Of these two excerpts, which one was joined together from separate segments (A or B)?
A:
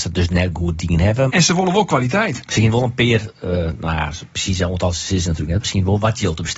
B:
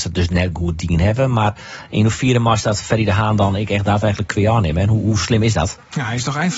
A